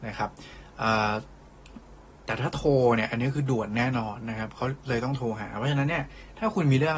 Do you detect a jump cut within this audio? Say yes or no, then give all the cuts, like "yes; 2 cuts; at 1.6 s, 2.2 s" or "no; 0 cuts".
no; 0 cuts